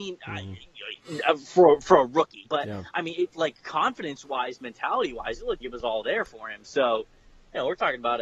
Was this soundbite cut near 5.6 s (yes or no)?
yes